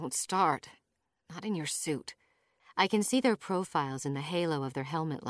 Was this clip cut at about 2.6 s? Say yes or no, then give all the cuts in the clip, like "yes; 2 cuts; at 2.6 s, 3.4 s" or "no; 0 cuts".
yes; 1 cut; at 2.6 s